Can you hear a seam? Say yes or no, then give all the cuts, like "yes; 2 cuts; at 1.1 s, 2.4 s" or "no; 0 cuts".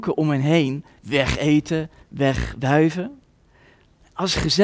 yes; 1 cut; at 2.0 s